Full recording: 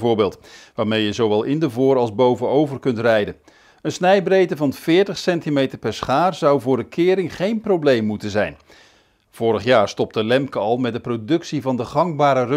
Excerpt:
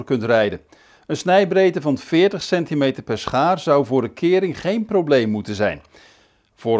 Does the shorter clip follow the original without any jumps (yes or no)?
yes